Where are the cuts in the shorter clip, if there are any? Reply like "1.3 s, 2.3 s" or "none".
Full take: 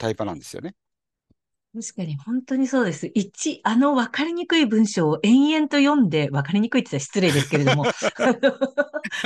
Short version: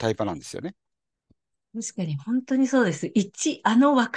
none